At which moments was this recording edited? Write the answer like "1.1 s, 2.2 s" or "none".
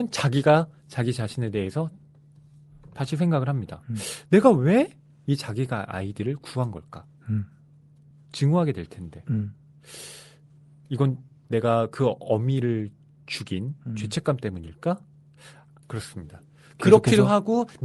8.1 s, 15.8 s